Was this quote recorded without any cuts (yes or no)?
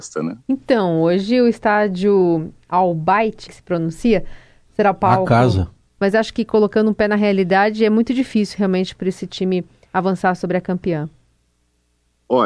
no